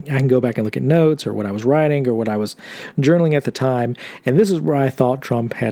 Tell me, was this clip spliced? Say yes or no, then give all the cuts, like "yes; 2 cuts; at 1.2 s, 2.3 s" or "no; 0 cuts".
no; 0 cuts